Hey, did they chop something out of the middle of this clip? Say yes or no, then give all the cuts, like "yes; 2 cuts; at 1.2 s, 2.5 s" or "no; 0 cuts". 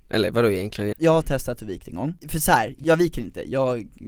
yes; 2 cuts; at 0.9 s, 2.2 s